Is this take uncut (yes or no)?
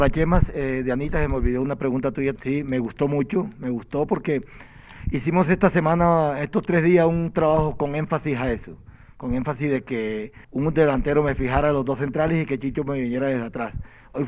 no